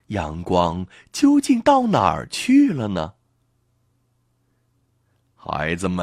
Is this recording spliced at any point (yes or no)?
no